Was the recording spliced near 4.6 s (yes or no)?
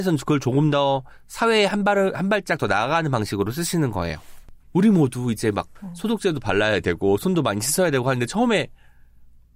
yes